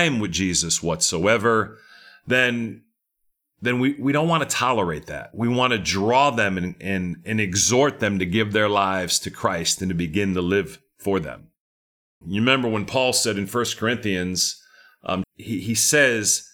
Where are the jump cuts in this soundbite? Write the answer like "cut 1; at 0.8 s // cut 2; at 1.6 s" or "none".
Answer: cut 1; at 12.2 s // cut 2; at 15.2 s

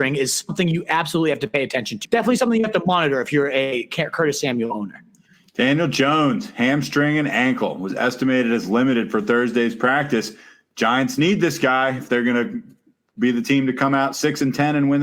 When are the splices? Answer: cut 1; at 2.0 s

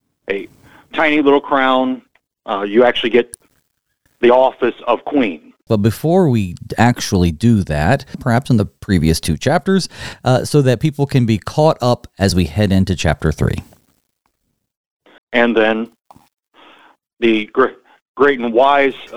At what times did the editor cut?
cut 1; at 5.7 s // cut 2; at 8.1 s // cut 3; at 15.2 s

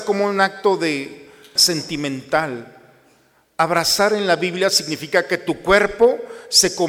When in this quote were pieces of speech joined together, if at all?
cut 1; at 1.6 s

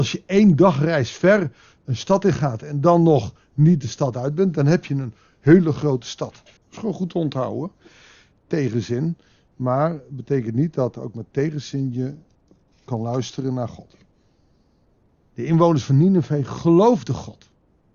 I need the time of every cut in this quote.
cut 1; at 6.6 s // cut 2; at 15.3 s

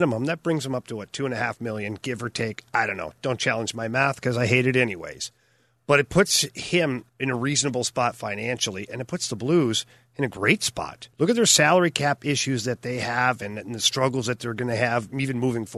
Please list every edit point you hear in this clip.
cut 1; at 7.1 s // cut 2; at 11.1 s

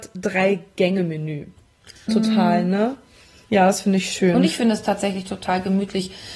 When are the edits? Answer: cut 1; at 2.1 s

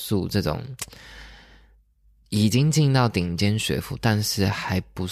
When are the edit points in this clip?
none

